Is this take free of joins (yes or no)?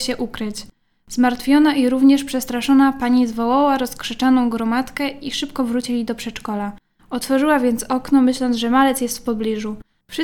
no